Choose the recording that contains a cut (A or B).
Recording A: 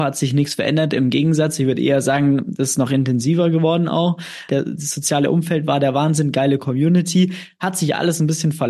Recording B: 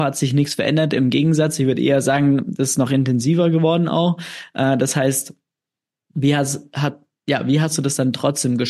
A